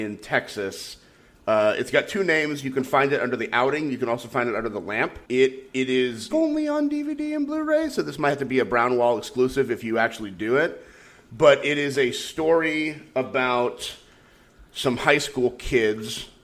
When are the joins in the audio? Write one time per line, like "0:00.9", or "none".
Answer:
0:06.3